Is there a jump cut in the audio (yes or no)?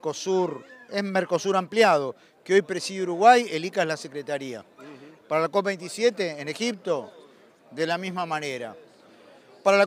yes